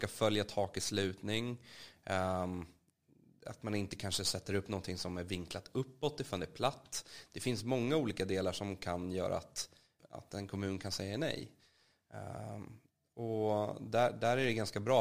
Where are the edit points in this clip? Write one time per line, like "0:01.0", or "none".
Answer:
0:10.0